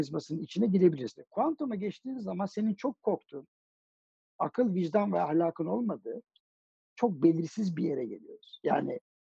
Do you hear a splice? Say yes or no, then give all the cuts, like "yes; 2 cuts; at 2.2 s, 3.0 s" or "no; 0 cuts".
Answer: yes; 1 cut; at 1.1 s